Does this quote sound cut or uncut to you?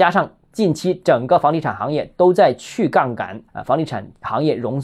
cut